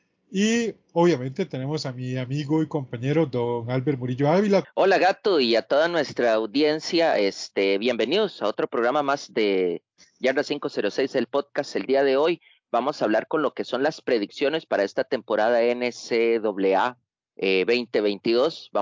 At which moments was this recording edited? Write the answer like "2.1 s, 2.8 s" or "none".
4.6 s